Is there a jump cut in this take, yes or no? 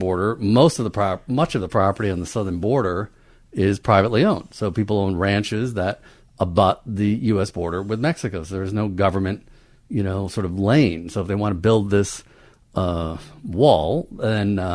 no